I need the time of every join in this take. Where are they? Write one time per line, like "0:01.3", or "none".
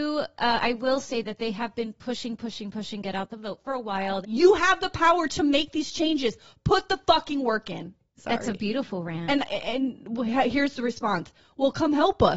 0:04.2
0:08.2